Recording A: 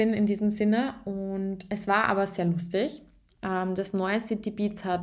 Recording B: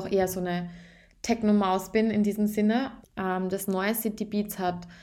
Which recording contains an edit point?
B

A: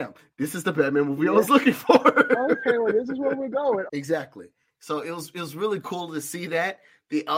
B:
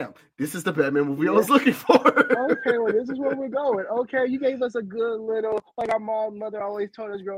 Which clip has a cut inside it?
A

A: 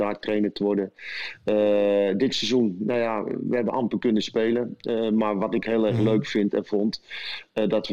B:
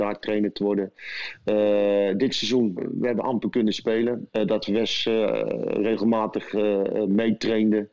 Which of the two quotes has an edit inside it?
B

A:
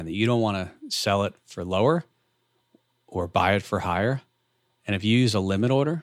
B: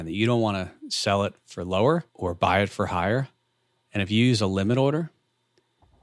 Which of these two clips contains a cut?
B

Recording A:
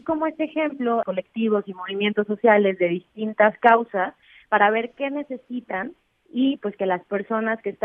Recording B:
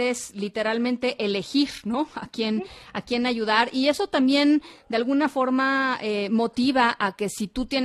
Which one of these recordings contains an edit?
A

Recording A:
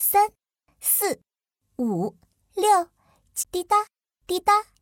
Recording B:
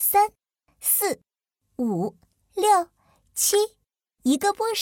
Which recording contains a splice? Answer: A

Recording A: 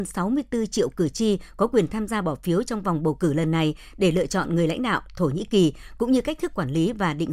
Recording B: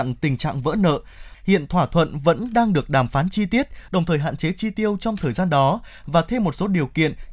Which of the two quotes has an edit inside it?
B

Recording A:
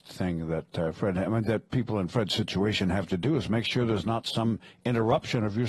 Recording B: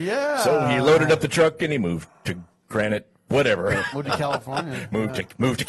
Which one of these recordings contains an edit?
B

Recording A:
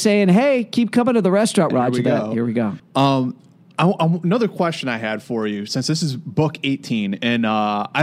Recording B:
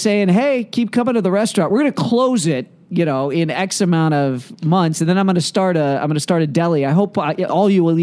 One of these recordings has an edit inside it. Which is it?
A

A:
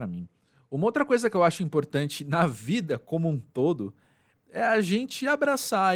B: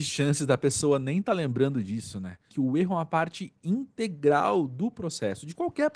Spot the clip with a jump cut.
B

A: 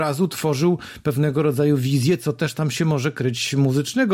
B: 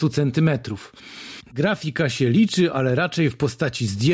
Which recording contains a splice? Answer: B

